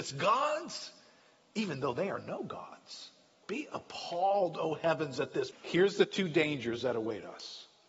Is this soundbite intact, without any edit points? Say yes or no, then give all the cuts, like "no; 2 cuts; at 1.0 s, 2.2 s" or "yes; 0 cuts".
no; 2 cuts; at 3.4 s, 5.5 s